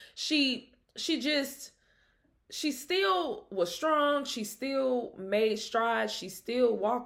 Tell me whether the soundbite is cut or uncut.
uncut